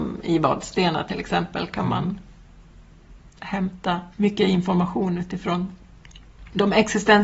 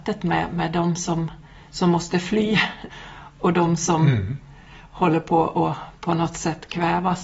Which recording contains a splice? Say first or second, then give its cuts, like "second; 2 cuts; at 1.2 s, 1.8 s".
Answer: first; 1 cut; at 4.1 s